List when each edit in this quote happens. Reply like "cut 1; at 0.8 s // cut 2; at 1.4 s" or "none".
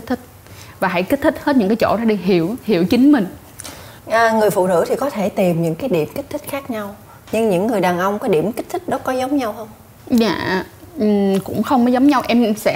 cut 1; at 4.0 s